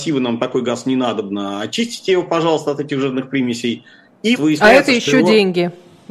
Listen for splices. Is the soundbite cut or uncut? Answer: cut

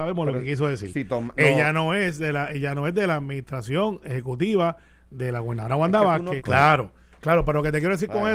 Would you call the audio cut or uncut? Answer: cut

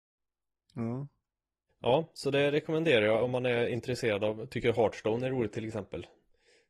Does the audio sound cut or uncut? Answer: cut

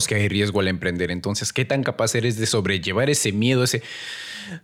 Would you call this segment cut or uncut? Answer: uncut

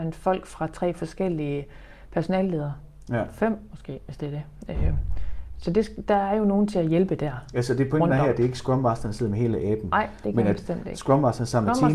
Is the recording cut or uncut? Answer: uncut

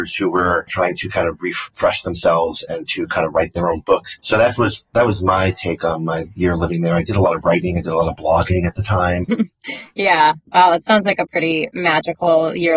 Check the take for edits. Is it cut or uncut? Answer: cut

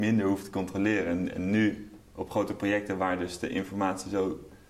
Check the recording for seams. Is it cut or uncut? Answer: uncut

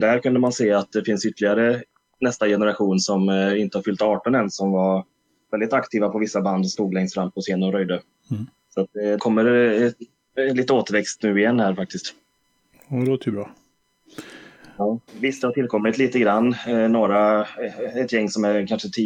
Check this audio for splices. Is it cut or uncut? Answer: cut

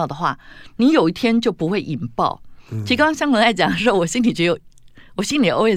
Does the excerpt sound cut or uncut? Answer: uncut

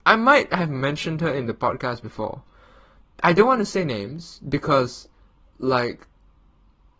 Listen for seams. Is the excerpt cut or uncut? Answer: uncut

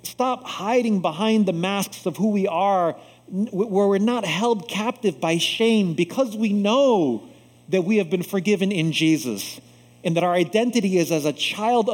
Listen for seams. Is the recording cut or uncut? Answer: uncut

